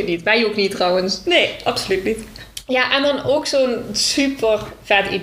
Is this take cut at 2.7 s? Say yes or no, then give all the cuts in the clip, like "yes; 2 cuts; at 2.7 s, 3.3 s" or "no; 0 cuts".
no; 0 cuts